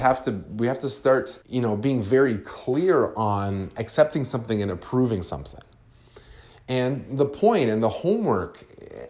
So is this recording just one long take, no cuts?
no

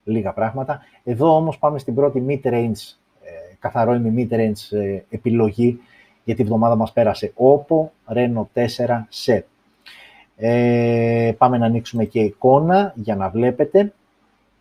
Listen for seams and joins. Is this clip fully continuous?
yes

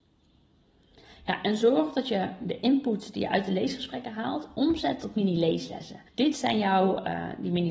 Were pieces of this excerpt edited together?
yes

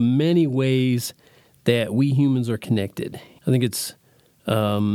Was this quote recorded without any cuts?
no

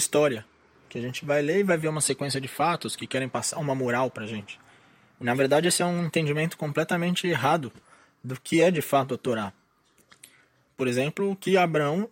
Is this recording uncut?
no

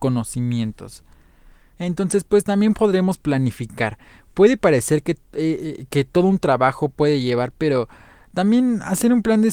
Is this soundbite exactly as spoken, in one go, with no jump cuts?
yes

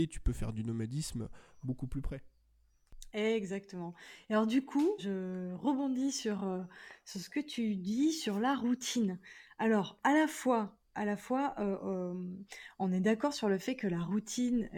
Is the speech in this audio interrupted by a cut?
yes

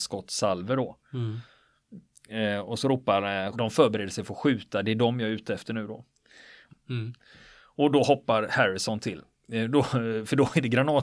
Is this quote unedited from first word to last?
no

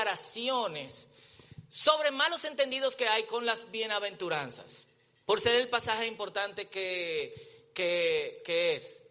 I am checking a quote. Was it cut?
no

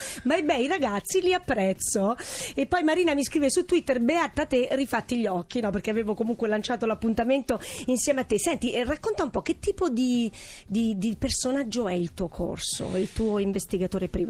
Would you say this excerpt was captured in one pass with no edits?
yes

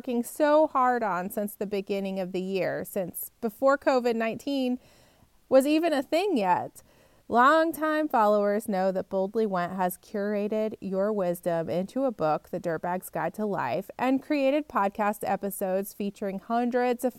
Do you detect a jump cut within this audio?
yes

